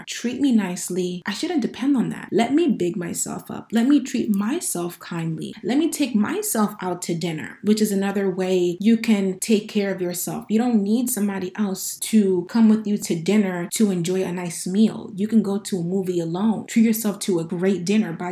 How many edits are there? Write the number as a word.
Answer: one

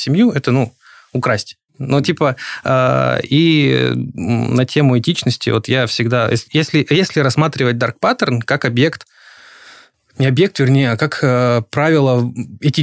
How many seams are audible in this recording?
one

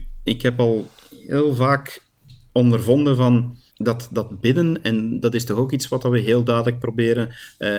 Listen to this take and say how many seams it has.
one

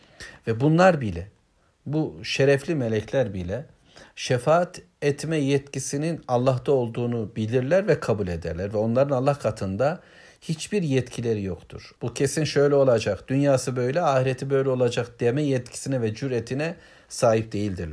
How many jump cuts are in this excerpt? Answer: one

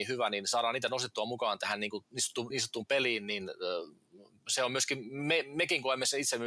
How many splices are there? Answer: one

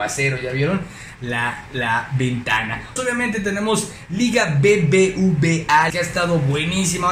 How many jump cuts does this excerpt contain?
three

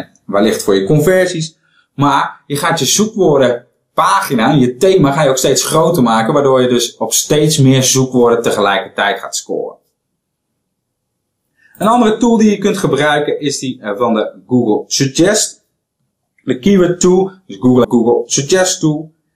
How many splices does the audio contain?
one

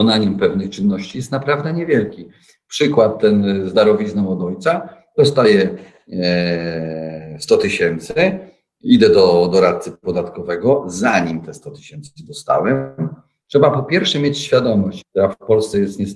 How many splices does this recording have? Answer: two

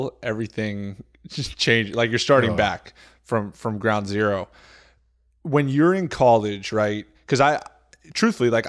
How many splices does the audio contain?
zero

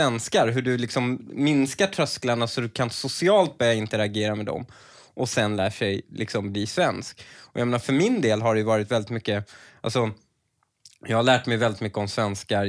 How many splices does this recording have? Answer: zero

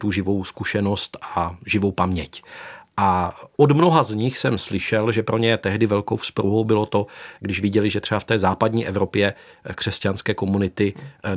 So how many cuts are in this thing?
zero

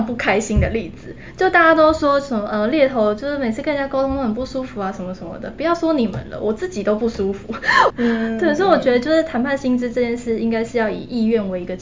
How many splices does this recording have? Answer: one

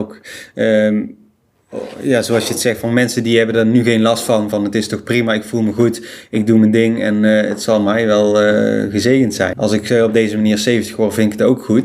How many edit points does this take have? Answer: one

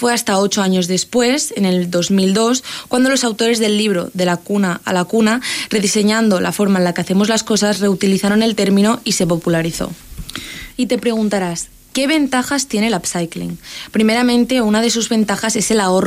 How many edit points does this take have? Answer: one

